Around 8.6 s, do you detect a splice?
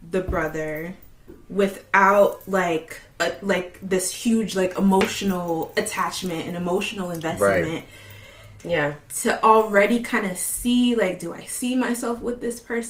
yes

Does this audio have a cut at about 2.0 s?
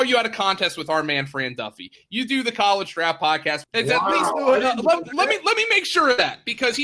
no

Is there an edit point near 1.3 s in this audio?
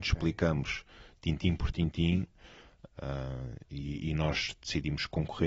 no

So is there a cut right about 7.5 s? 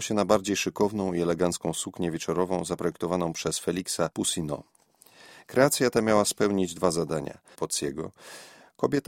yes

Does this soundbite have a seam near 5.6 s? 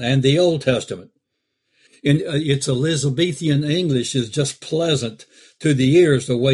no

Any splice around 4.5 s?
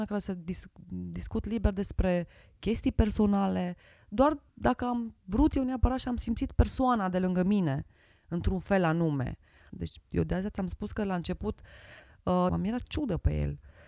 yes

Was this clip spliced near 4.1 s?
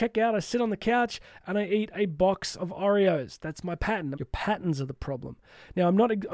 yes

